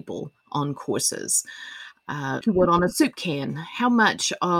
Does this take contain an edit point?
yes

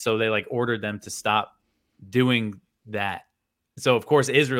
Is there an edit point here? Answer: no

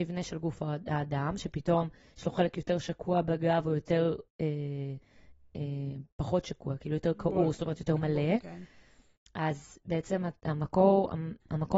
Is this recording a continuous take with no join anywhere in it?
yes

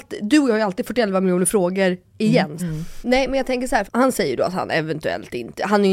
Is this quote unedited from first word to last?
no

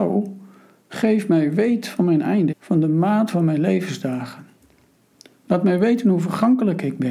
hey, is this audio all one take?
no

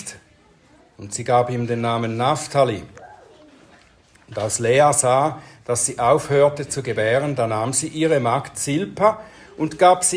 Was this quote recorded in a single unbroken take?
yes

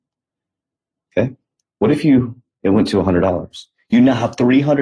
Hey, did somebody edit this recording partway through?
yes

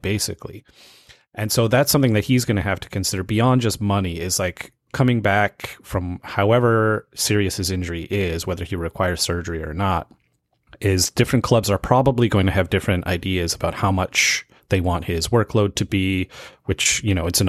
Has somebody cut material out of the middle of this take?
no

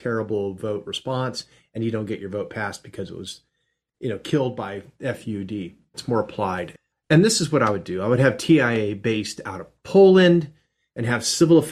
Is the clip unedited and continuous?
no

